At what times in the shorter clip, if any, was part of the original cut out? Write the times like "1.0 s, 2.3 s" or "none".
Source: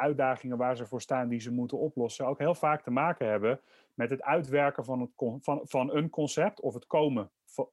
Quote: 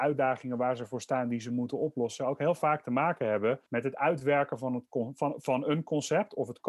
3.7 s